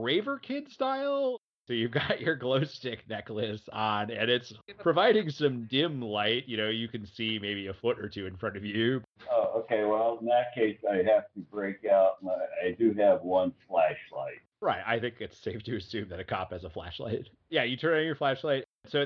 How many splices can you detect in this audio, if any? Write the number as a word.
one